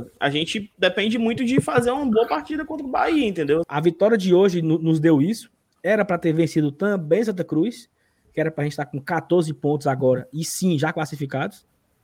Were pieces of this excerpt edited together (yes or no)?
yes